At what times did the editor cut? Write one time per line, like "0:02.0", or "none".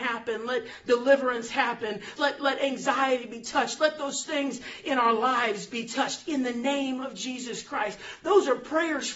0:02.2